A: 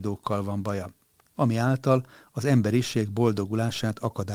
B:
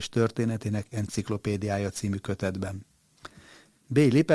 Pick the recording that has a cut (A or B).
A